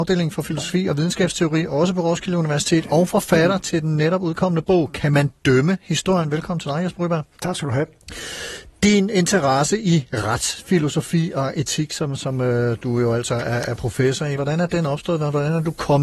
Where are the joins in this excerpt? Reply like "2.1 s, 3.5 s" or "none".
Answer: 14.4 s